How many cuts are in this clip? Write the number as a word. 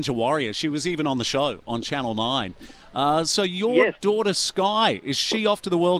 zero